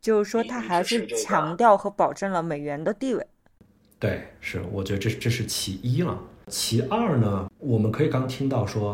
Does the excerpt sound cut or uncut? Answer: uncut